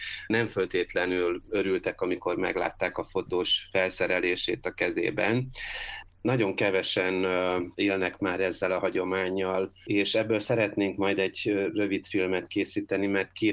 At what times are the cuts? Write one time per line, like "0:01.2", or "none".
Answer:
0:06.1